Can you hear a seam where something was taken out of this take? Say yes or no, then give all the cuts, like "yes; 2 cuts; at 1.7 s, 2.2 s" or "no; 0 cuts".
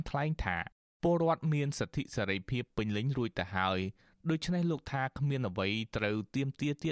no; 0 cuts